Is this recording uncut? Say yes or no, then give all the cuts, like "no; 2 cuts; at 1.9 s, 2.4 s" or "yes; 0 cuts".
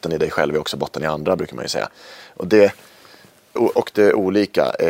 no; 1 cut; at 3.6 s